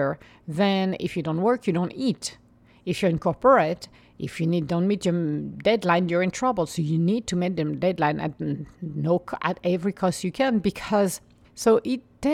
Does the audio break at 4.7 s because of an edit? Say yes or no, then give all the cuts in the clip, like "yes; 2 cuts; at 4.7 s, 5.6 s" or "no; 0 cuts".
no; 1 cut; at 11.4 s